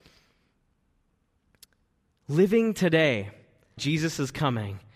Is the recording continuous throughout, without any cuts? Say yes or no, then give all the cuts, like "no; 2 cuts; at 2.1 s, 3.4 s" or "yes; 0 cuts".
no; 1 cut; at 3.8 s